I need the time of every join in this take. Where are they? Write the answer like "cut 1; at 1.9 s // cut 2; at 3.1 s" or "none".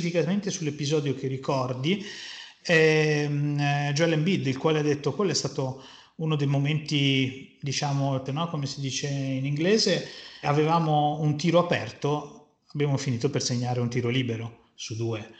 cut 1; at 8.3 s // cut 2; at 10.4 s